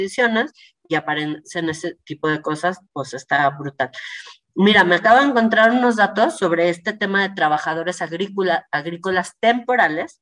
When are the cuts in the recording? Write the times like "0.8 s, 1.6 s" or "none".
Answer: none